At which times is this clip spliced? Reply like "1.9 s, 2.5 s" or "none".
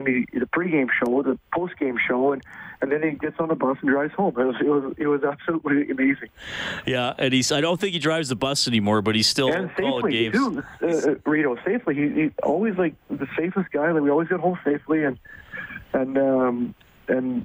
none